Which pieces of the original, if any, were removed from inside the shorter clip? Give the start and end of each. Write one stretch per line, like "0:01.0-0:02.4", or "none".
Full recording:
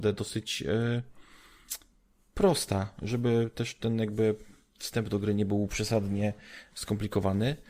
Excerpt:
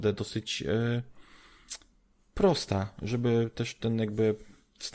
none